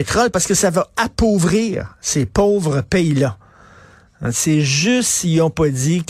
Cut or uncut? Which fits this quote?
cut